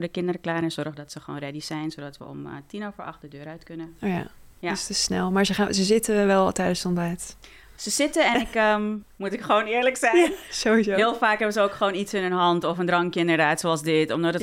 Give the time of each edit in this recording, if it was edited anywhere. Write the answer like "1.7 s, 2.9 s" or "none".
9.0 s